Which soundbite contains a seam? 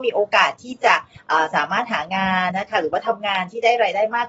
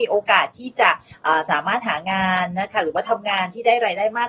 first; 1 cut; at 2.5 s

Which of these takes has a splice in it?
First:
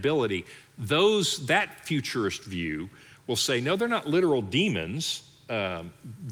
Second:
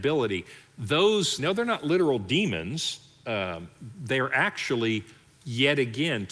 second; 1 cut; at 1.4 s

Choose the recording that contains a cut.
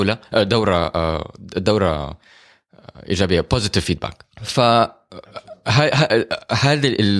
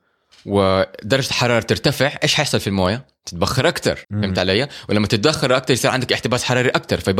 second; 1 cut; at 4.0 s

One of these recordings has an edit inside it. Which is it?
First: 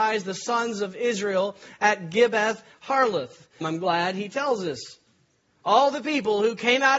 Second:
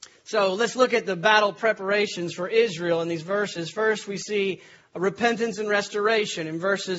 first; 1 cut; at 3.6 s

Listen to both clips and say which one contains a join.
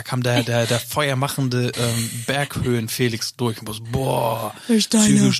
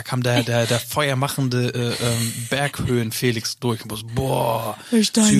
first; 1 cut; at 1.7 s

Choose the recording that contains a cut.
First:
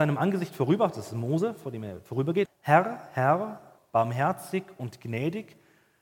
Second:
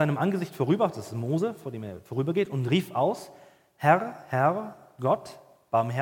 first; 2 cuts; at 2.5 s, 3.8 s

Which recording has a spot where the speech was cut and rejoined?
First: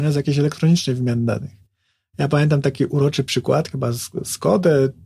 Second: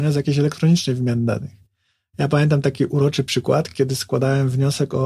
first; 1 cut; at 3.7 s

